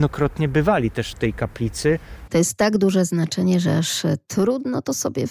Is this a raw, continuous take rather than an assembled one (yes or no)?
no